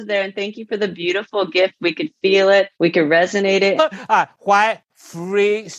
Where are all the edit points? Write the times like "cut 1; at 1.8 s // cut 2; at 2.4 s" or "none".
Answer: cut 1; at 2.7 s // cut 2; at 3.8 s